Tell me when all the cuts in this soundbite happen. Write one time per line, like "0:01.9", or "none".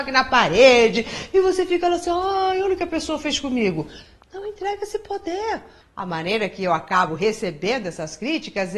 0:05.8